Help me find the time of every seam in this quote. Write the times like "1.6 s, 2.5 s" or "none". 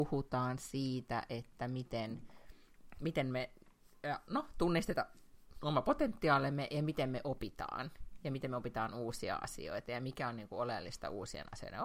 none